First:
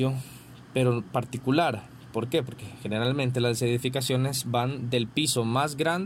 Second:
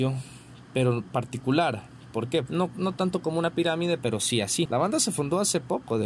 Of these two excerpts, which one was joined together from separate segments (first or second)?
second